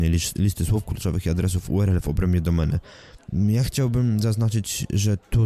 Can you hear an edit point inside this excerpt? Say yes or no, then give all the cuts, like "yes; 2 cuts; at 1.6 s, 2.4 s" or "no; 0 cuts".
yes; 1 cut; at 3.3 s